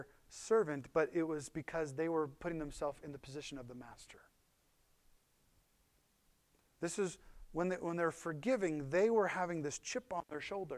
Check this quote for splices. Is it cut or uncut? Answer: uncut